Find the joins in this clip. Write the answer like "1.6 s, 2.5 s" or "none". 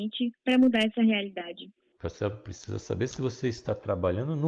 2.0 s